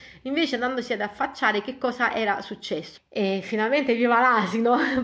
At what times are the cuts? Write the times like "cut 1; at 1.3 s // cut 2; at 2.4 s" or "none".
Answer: cut 1; at 3.0 s